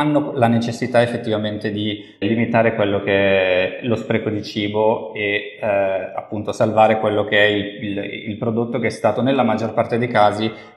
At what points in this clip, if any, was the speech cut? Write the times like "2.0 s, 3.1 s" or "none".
2.2 s